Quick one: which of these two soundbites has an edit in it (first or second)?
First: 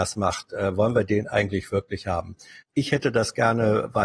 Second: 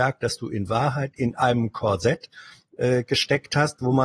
first